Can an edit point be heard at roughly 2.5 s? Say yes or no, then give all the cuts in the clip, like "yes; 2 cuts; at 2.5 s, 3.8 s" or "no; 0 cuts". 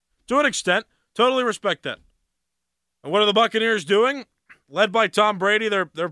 no; 0 cuts